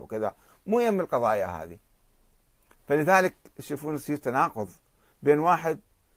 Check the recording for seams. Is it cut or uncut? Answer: uncut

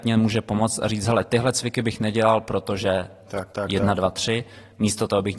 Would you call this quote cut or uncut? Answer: uncut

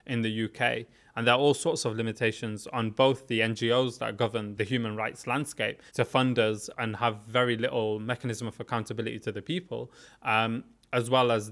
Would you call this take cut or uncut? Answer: cut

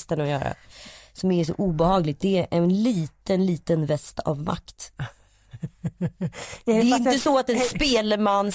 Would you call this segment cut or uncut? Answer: uncut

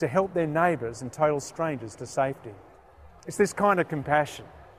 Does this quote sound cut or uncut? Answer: uncut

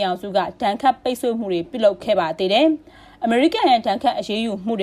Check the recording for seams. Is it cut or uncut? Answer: uncut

